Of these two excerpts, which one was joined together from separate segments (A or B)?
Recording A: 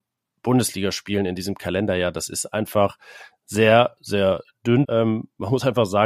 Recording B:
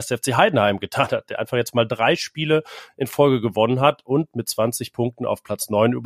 A